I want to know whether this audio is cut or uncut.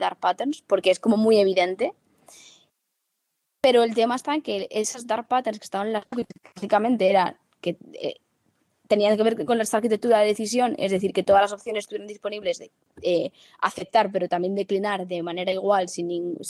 uncut